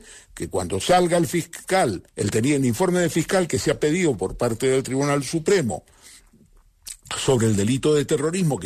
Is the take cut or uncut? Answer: cut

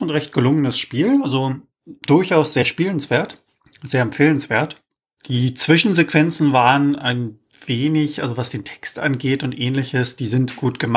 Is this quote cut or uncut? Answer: uncut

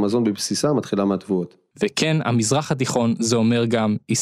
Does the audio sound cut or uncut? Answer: cut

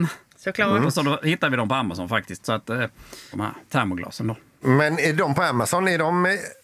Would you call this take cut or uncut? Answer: cut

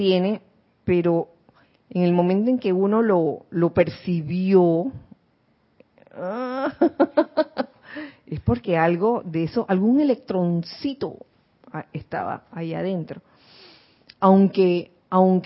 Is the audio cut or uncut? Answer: uncut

